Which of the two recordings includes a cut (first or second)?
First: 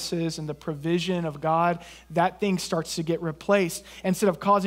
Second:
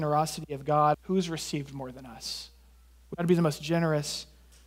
second